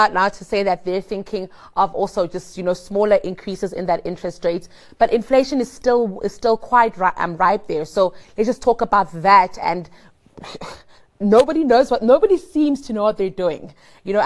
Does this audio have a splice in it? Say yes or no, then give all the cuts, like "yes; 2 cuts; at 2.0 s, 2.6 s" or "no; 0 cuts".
no; 0 cuts